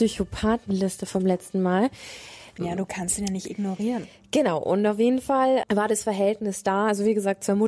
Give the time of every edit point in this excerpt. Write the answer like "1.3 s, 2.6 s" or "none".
2.6 s, 5.6 s